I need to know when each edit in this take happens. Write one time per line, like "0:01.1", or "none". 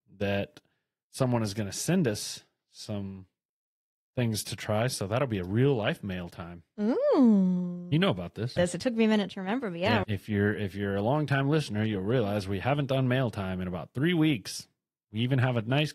0:08.6
0:10.0